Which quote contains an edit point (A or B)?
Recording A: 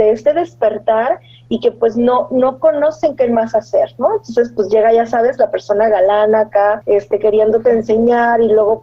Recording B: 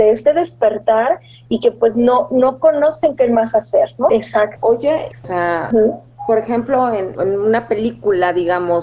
B